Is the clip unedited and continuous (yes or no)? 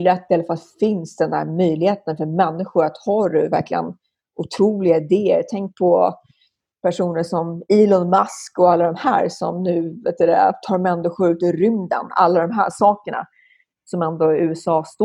yes